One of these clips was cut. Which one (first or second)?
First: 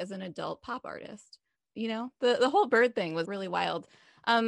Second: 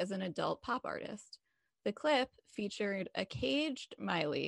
first